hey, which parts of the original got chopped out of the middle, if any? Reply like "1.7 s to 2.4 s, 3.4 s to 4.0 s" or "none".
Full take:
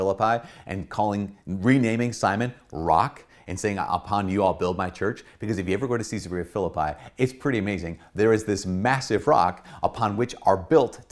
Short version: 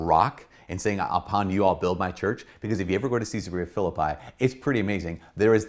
none